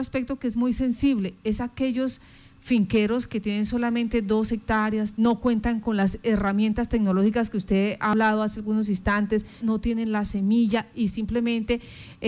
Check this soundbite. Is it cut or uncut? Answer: cut